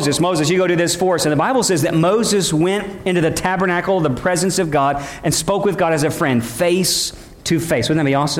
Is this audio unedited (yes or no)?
yes